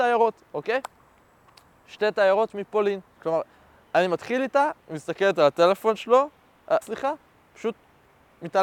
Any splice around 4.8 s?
yes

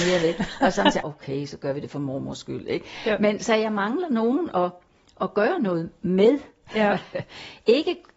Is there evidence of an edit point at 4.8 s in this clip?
no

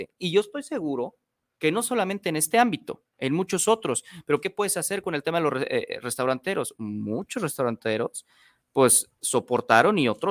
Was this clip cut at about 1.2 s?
no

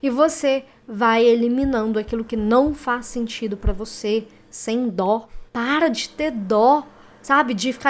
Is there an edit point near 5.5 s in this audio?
yes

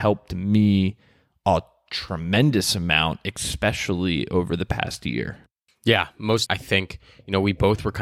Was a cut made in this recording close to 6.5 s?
yes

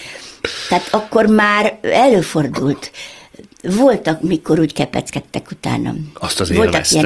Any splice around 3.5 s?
no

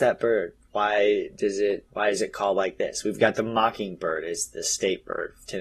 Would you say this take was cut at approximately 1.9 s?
yes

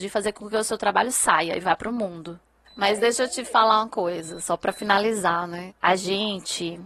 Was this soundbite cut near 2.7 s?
yes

